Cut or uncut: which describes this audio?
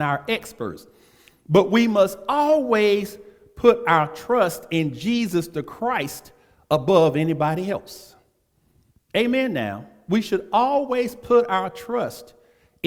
uncut